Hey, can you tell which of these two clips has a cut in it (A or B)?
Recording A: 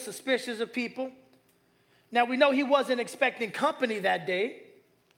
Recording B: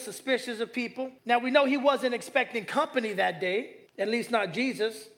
B